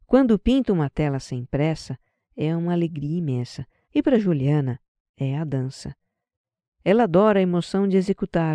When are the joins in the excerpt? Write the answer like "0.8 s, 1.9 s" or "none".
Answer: 3.8 s